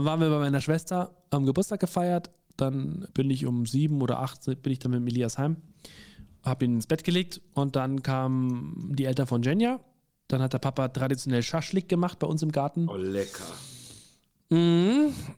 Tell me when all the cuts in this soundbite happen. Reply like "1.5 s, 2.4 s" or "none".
3.1 s